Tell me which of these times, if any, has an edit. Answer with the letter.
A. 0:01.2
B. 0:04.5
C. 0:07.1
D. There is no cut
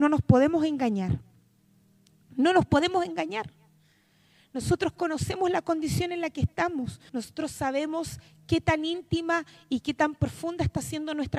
C